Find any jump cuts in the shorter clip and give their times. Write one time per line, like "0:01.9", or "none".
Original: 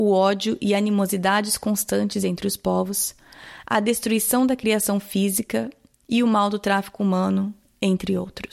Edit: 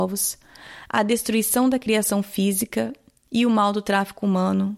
none